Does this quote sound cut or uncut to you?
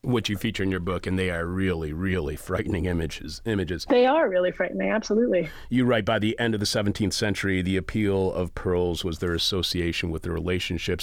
uncut